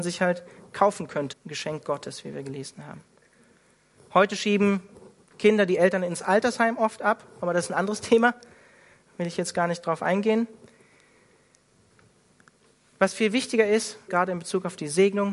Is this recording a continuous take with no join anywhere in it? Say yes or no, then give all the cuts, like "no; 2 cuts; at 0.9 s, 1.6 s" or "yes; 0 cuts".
no; 2 cuts; at 1.3 s, 14.1 s